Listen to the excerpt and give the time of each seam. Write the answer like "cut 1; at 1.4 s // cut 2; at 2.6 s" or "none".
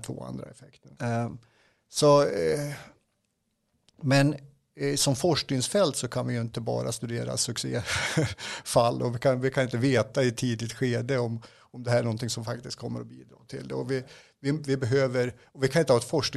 cut 1; at 1.0 s